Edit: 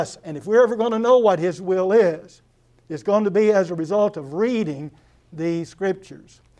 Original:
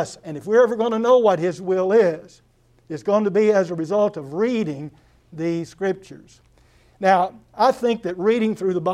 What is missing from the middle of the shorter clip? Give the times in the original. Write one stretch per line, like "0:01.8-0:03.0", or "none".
none